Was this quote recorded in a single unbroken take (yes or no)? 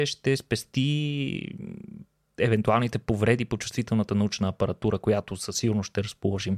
yes